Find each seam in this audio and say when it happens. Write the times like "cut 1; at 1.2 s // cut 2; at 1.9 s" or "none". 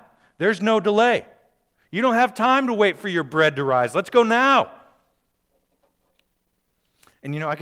none